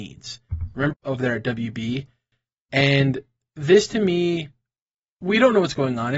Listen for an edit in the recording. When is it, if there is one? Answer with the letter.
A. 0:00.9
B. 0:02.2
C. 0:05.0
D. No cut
A